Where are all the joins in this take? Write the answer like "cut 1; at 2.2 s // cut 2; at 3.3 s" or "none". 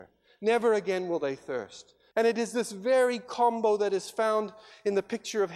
cut 1; at 2.1 s